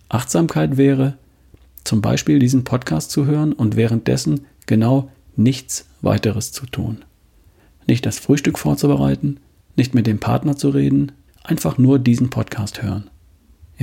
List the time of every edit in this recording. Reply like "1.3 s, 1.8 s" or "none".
9.6 s, 11.3 s